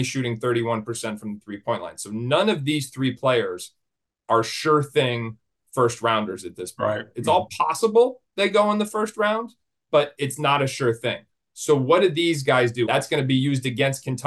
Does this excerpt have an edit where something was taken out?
yes; 2 cuts; at 9.9 s, 12.9 s

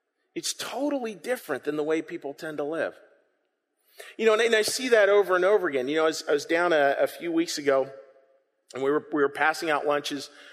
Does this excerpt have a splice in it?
no; 0 cuts

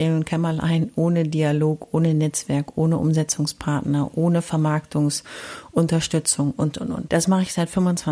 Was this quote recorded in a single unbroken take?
no; 1 cut; at 7.1 s

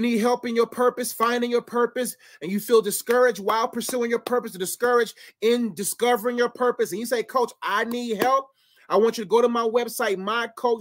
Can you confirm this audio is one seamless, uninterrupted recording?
yes; 0 cuts

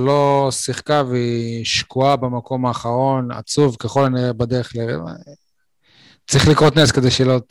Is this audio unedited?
yes; 0 cuts

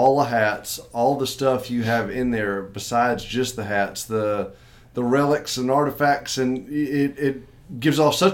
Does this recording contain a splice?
no; 0 cuts

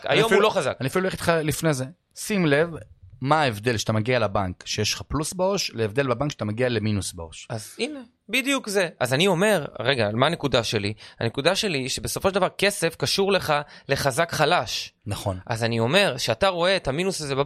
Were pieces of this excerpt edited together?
no; 0 cuts

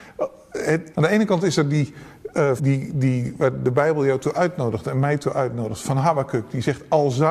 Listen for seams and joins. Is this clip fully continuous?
no; 2 cuts; at 0.9 s, 2.6 s

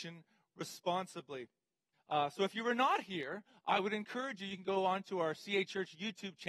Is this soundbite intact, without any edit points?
no; 1 cut; at 1.9 s

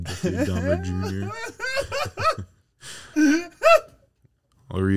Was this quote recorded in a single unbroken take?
yes; 0 cuts

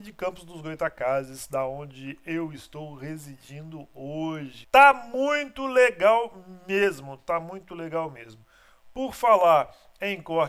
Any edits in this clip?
yes; 1 cut; at 4.6 s

